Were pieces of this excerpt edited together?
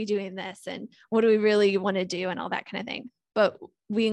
no; 0 cuts

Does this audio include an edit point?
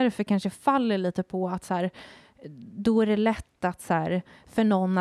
no; 0 cuts

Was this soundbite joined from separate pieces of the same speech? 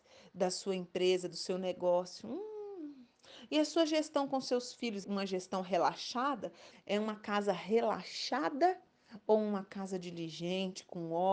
yes; 2 cuts; at 5.0 s, 6.7 s

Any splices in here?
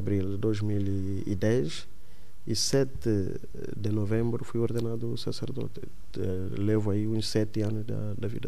no; 0 cuts

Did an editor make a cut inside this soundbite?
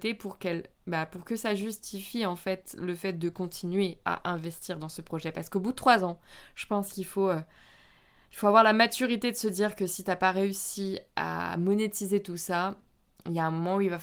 no; 0 cuts

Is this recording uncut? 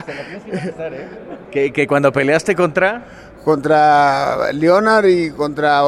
no; 1 cut; at 1.4 s

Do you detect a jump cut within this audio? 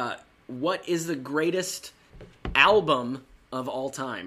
no; 0 cuts

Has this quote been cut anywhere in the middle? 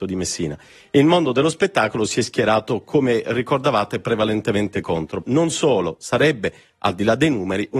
yes; 1 cut; at 5.2 s

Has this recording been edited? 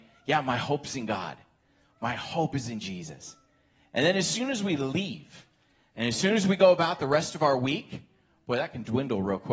no; 0 cuts

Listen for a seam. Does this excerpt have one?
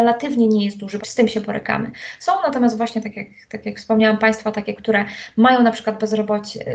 yes; 1 cut; at 1.0 s

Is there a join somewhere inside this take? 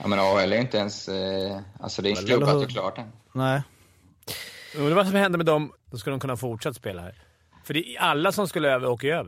yes; 2 cuts; at 2.1 s, 5.7 s

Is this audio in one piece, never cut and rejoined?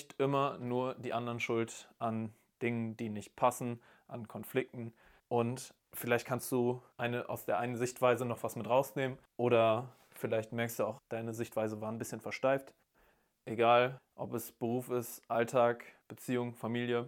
no; 3 cuts; at 5.2 s, 11.0 s, 13.4 s

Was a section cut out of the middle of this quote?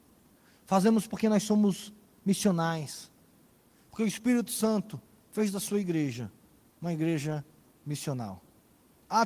no; 0 cuts

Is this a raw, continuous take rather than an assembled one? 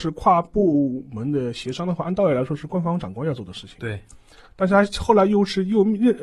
yes; 0 cuts

